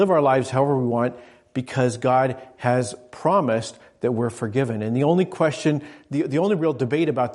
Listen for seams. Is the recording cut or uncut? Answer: uncut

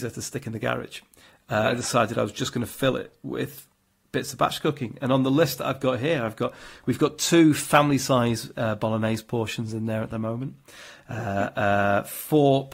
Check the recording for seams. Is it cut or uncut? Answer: uncut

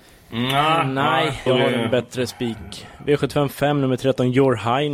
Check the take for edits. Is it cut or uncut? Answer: cut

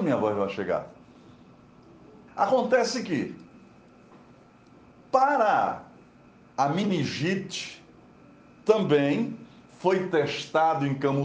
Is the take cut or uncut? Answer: cut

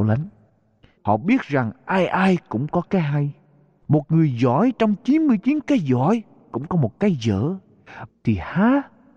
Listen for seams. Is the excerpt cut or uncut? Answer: cut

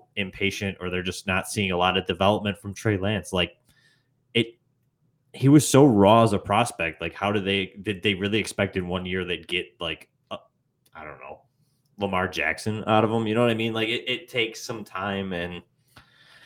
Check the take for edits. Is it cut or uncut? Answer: uncut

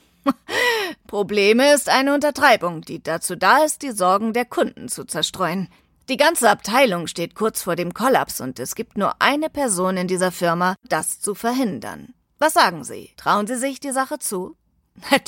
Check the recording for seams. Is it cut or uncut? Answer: cut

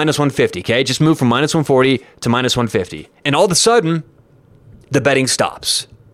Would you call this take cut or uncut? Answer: uncut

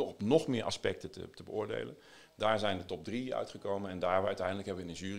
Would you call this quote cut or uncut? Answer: uncut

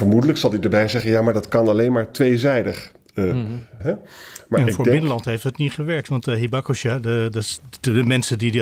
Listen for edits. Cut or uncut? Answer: cut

